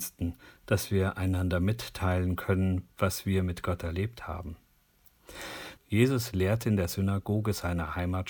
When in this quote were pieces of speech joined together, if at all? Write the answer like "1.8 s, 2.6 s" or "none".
5.8 s